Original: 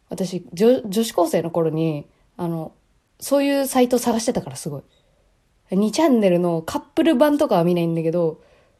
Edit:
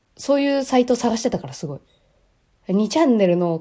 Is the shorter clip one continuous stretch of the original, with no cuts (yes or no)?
yes